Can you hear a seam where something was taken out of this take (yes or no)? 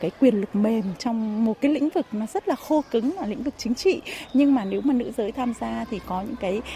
yes